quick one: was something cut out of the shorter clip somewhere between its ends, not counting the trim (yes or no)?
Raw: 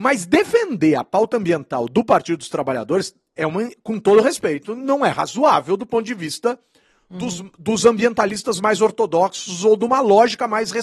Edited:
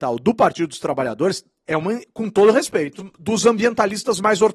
yes